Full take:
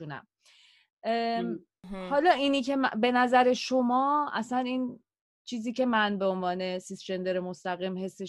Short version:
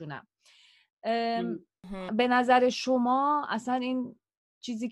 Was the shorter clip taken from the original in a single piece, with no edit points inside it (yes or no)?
no